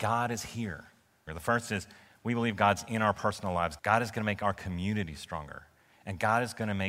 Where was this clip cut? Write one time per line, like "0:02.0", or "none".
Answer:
0:01.3
0:03.8